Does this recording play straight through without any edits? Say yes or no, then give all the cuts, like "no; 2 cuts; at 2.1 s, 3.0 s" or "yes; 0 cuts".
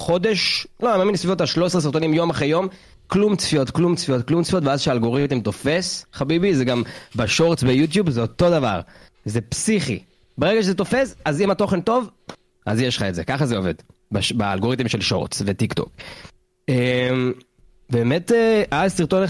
yes; 0 cuts